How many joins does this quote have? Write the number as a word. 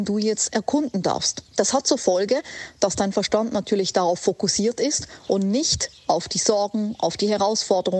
one